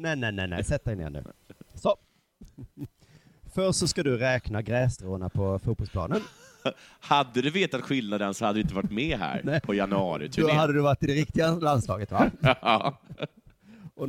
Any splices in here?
no; 0 cuts

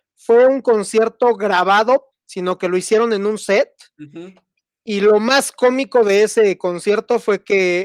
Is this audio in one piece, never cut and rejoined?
no; 1 cut; at 2.1 s

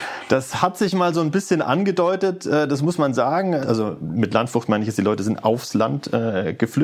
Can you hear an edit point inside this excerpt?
yes; 1 cut; at 3.6 s

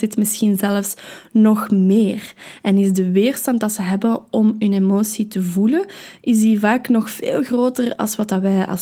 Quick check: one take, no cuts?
yes; 0 cuts

